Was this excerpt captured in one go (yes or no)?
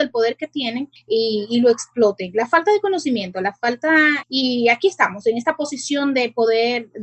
no